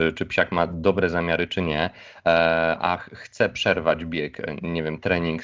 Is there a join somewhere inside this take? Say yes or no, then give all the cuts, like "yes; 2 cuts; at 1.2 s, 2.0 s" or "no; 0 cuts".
no; 0 cuts